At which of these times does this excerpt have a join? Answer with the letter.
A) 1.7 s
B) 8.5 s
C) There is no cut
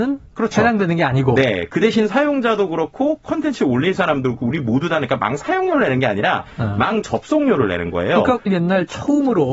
B